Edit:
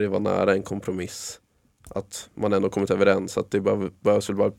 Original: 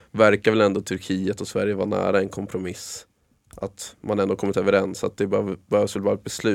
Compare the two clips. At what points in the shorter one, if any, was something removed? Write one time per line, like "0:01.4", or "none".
none